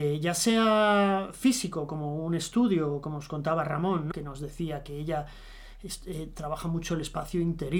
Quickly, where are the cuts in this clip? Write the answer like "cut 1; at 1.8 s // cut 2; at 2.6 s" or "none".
cut 1; at 4.1 s